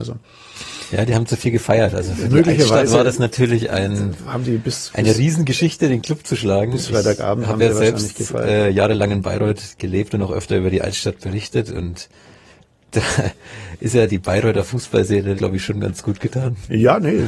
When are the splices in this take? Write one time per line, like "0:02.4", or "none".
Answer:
0:14.1
0:15.4